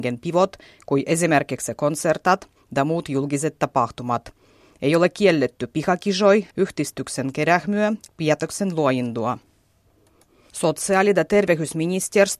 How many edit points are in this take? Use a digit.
2